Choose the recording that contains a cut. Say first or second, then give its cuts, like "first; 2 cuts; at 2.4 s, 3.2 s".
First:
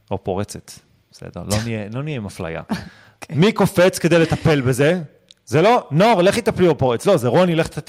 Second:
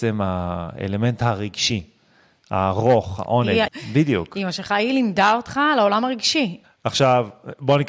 second; 2 cuts; at 3.7 s, 6.6 s